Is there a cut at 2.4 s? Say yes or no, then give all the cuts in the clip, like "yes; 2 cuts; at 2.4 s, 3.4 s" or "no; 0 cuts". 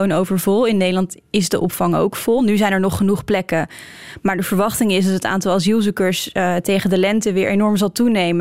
no; 0 cuts